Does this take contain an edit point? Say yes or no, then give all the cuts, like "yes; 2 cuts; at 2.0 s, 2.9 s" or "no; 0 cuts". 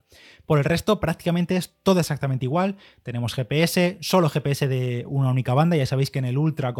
no; 0 cuts